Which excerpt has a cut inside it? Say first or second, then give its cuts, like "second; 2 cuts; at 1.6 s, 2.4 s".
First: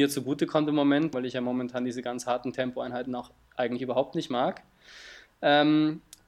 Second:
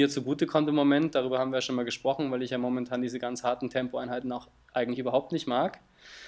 first; 1 cut; at 1.1 s